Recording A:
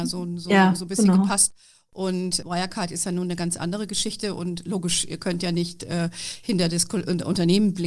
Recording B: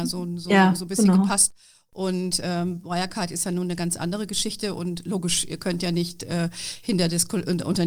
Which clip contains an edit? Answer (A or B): A